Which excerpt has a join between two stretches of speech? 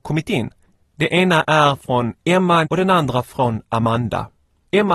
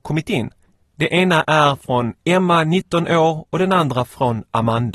first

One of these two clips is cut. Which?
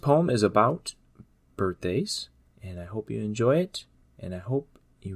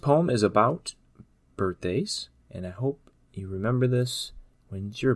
second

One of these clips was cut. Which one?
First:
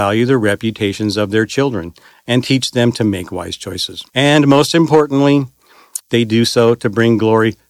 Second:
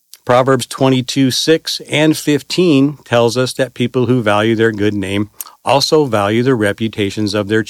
first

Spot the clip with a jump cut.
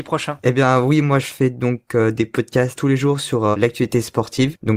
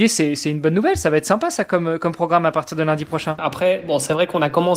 second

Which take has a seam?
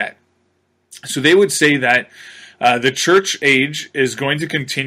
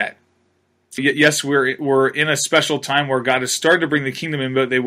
second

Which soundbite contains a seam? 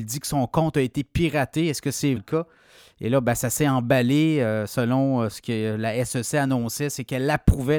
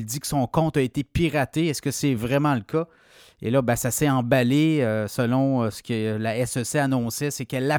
first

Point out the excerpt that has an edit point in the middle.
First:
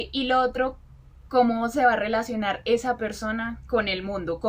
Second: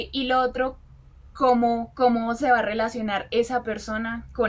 first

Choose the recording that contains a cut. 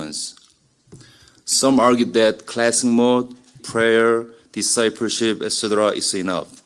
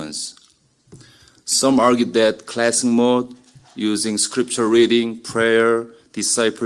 first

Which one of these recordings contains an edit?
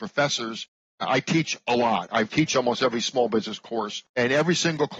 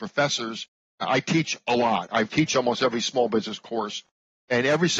first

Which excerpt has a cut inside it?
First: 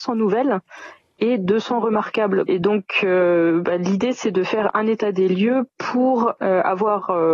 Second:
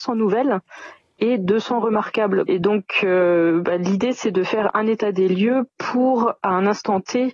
first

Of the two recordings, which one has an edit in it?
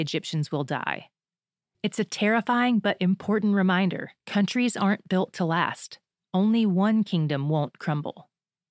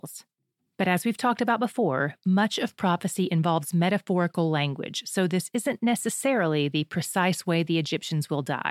first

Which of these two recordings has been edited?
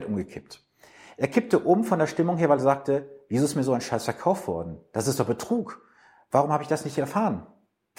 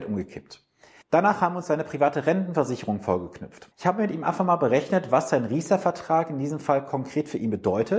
second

